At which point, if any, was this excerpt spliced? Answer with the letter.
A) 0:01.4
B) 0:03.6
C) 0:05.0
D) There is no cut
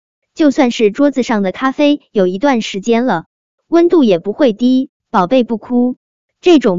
C